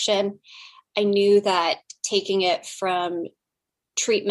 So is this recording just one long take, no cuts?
yes; 0 cuts

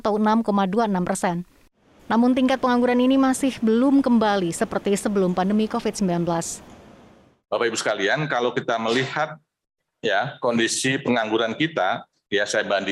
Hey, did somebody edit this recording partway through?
no; 0 cuts

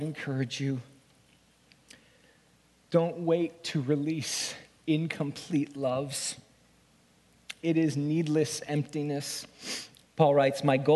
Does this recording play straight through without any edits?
no; 1 cut; at 10.0 s

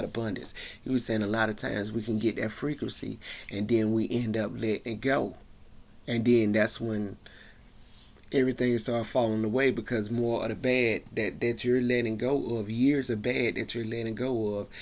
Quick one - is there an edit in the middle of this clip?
no; 0 cuts

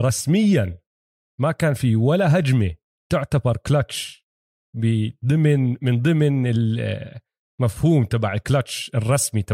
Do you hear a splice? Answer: no; 0 cuts

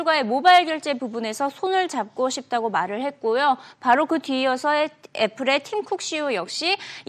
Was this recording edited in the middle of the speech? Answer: no; 0 cuts

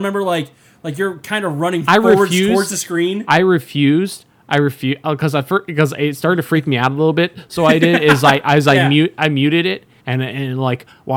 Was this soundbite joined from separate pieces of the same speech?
yes; 1 cut; at 10.0 s

